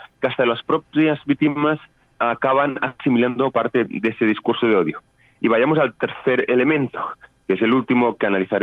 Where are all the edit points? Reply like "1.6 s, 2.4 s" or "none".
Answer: none